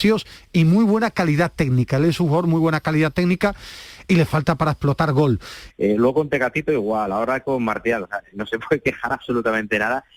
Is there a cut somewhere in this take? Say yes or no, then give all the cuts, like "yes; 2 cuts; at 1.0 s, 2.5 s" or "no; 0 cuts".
yes; 2 cuts; at 5.7 s, 8.3 s